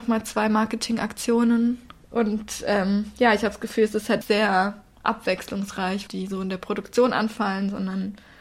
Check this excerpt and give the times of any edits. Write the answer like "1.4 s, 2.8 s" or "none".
4.2 s, 6.1 s